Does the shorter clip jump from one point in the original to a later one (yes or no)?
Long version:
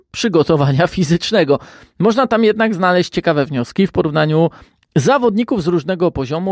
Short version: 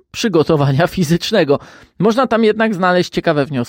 no